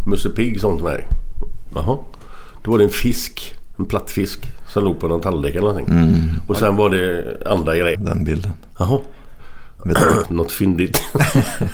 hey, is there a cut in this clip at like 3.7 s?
no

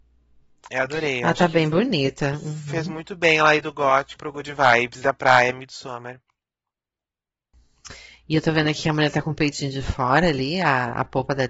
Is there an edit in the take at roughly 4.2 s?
yes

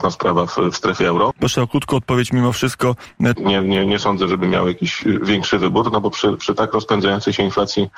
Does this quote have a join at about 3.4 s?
yes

